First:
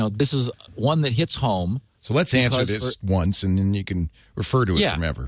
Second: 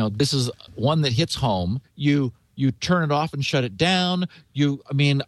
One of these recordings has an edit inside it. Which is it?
second; 1 cut; at 1.8 s

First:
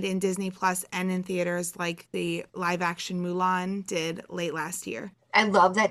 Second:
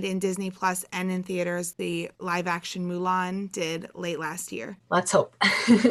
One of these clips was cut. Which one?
second; 2 cuts; at 1.7 s, 4.8 s

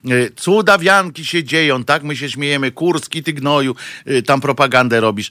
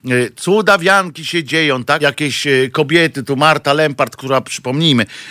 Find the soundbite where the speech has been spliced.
second; 1 cut; at 2.0 s

